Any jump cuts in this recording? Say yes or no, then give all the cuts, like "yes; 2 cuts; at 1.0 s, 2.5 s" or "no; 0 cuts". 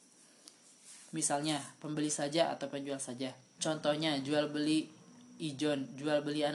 yes; 2 cuts; at 1.1 s, 3.6 s